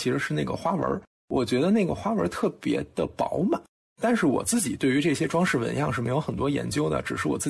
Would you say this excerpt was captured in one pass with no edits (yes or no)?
yes